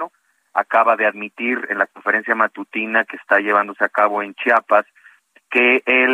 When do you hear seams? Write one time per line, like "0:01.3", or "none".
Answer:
none